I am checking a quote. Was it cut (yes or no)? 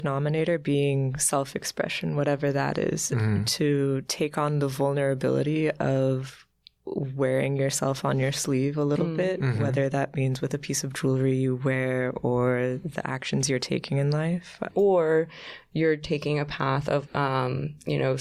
yes